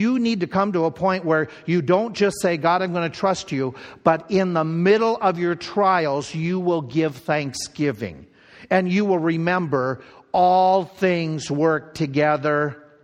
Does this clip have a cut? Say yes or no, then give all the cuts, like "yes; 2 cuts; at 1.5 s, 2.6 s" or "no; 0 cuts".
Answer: no; 0 cuts